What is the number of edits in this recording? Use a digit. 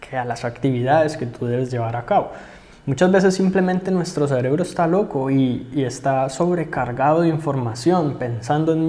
0